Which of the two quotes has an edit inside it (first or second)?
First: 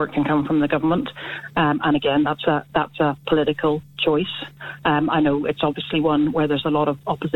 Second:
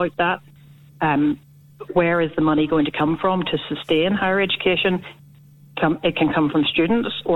second